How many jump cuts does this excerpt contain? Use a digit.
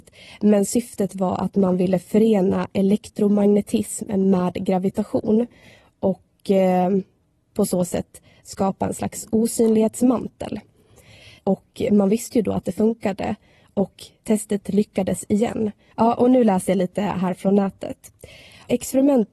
2